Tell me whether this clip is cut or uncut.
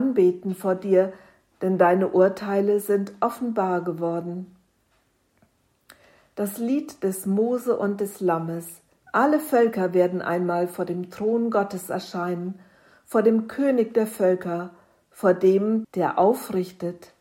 cut